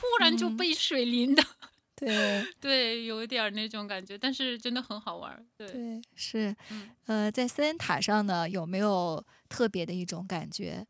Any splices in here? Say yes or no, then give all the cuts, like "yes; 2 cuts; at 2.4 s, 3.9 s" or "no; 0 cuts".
no; 0 cuts